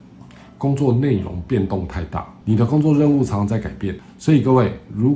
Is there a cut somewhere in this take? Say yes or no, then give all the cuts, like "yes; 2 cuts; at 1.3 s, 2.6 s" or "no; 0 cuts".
yes; 1 cut; at 4.1 s